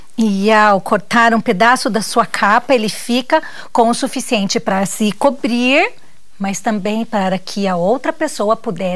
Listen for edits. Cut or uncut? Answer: uncut